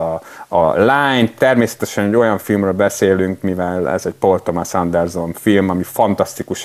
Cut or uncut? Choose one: uncut